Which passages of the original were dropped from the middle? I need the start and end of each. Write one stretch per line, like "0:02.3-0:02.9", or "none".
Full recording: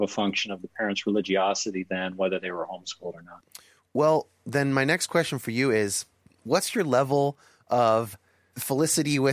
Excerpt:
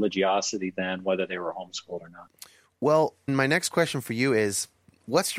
0:04.4-0:04.7

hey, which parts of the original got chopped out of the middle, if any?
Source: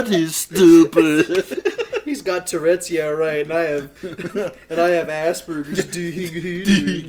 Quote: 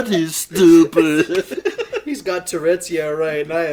none

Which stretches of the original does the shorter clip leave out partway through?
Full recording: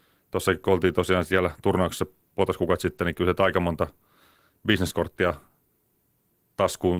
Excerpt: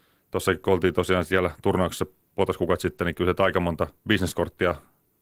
0:04.0-0:04.6

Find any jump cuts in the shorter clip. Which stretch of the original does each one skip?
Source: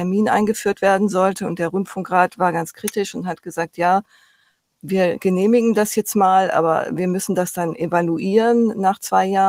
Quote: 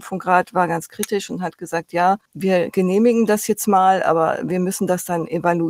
0:04.1-0:04.7

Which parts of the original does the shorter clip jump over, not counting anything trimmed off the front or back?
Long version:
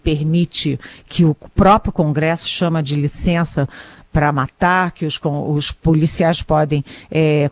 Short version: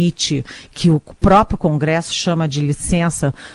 none

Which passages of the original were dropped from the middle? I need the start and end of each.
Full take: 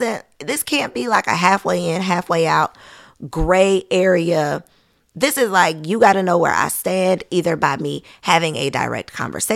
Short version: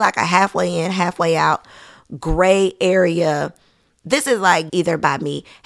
0:05.8-0:07.3

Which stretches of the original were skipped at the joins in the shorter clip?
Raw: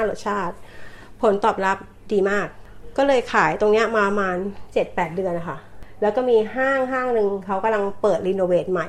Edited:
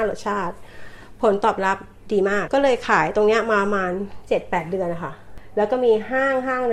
0:02.5-0:02.9

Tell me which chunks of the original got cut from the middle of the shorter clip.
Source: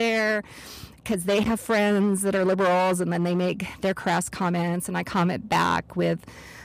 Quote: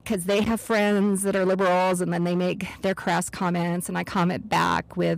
none

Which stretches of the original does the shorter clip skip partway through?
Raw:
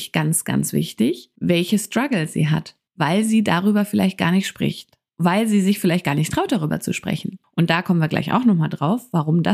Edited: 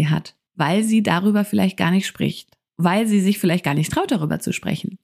none

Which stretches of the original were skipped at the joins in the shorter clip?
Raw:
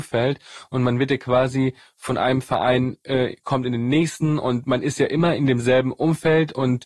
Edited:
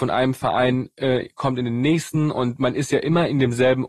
none

